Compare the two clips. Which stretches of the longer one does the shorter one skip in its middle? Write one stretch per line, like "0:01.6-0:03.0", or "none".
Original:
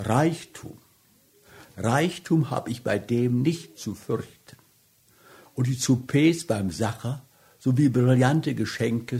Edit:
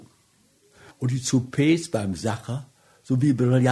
0:01.6-0:05.5